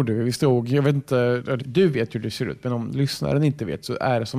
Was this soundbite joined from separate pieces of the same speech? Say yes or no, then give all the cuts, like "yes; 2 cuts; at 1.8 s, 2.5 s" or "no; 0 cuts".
yes; 1 cut; at 1.6 s